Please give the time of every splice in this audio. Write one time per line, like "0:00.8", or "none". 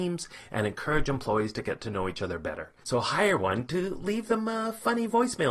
0:02.8